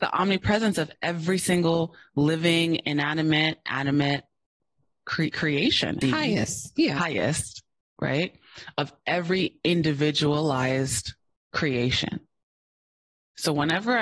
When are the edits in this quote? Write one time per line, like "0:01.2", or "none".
0:06.0